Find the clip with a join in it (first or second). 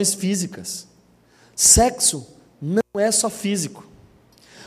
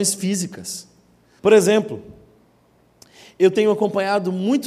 second